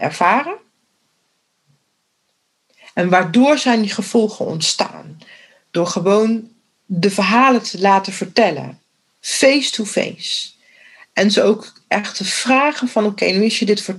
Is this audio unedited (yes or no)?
yes